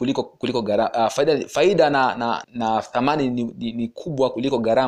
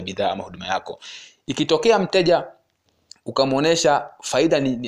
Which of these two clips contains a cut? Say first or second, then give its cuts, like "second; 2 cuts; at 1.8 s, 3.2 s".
first; 1 cut; at 2.4 s